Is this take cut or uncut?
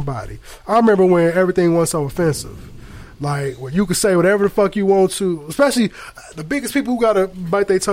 uncut